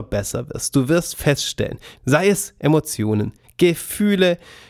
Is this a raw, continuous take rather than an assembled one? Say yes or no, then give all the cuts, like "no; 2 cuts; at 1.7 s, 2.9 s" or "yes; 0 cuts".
no; 2 cuts; at 2.0 s, 3.4 s